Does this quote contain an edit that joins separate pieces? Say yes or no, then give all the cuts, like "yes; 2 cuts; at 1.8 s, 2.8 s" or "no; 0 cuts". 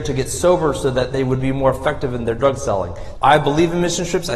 yes; 1 cut; at 3.2 s